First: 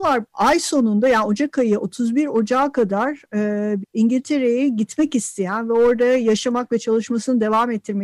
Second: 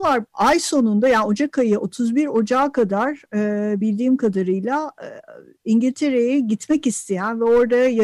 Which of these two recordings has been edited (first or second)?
first